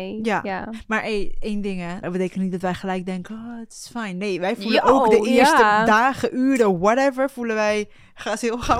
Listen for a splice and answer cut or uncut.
cut